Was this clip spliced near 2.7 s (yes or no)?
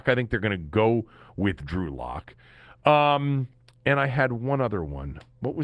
no